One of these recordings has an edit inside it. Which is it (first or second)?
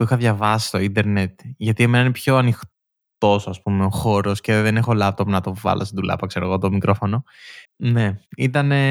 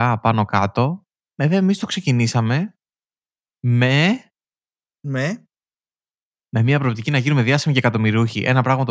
first